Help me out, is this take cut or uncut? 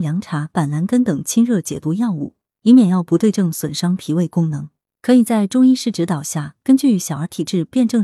uncut